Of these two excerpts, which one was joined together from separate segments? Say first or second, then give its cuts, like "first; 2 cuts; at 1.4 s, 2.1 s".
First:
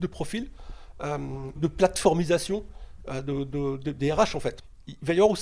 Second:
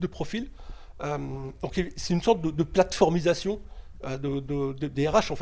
first; 1 cut; at 1.6 s